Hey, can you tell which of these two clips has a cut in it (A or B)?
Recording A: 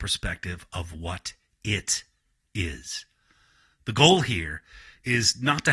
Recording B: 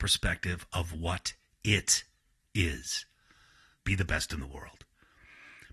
B